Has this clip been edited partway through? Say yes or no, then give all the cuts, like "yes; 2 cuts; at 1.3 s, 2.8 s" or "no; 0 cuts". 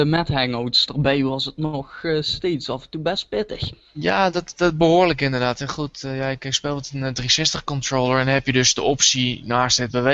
no; 0 cuts